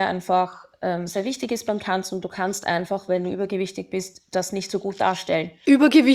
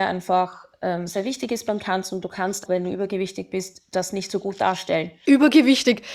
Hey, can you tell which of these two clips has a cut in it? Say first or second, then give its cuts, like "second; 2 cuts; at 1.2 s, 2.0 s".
second; 1 cut; at 2.7 s